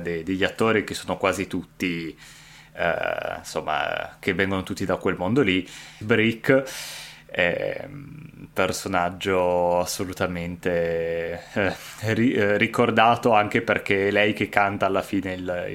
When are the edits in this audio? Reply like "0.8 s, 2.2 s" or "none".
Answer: 6.0 s